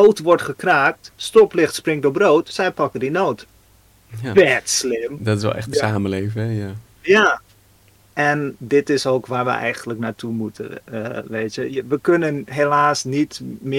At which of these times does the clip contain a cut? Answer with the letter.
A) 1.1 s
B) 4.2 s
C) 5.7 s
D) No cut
C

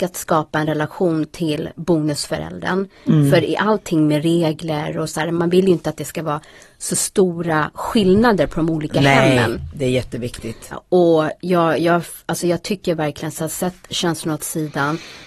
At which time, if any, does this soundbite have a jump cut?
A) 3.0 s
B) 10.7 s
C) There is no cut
B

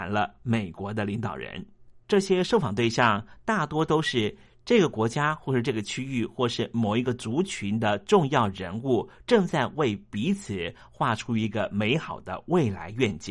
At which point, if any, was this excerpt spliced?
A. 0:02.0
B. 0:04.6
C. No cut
A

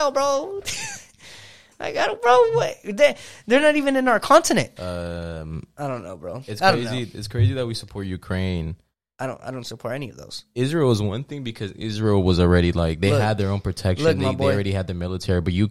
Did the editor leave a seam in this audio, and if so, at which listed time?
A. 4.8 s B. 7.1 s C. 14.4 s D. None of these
A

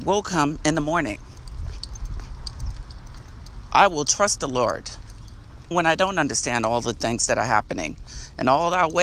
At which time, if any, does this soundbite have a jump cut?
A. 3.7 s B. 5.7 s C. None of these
B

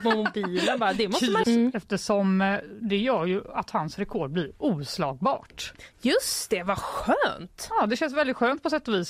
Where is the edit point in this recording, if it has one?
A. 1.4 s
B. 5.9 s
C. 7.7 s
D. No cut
A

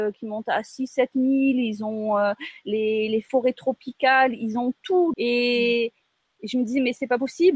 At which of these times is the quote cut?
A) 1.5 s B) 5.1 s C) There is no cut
B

